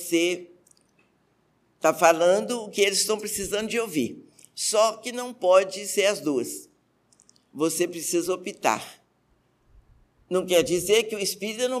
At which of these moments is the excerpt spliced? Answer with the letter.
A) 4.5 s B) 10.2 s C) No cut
C